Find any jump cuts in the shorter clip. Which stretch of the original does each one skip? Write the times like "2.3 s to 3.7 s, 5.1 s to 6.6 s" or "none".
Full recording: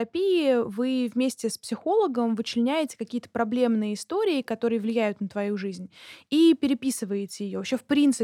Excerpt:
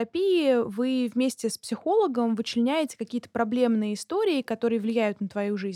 none